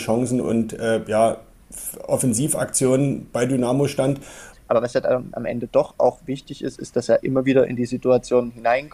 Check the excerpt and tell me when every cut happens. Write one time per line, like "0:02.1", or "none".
0:04.5